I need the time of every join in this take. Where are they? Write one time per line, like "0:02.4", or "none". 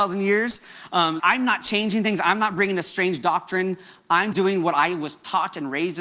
0:01.2
0:04.3